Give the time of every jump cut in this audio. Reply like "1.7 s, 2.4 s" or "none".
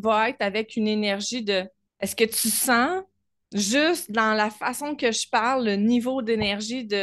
1.9 s